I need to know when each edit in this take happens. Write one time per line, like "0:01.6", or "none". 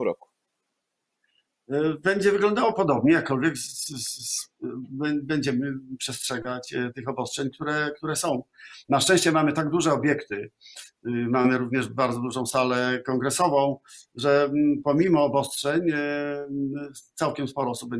none